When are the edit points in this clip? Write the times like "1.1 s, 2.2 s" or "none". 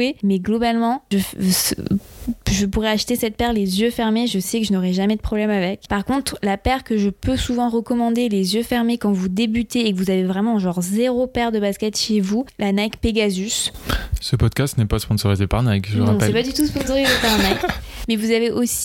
5.9 s